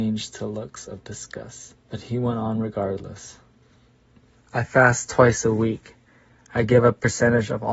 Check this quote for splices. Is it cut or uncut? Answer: cut